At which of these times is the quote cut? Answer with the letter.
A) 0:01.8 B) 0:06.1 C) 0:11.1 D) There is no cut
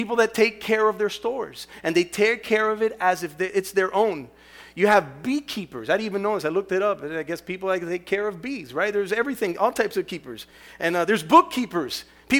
D